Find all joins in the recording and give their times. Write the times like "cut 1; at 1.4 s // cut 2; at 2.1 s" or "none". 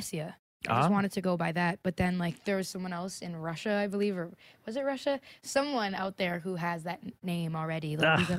none